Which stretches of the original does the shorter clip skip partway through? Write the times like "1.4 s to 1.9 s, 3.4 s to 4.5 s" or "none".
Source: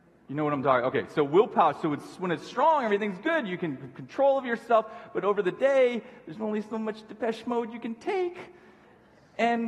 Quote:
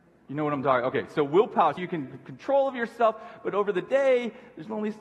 1.8 s to 3.5 s